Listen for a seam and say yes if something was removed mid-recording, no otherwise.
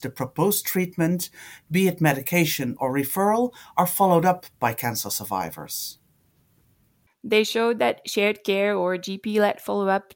yes